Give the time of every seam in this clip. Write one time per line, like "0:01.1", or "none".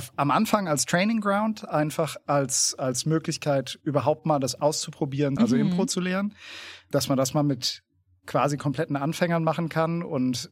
0:05.4
0:06.9